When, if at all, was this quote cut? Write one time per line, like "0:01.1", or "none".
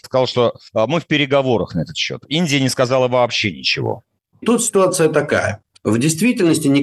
none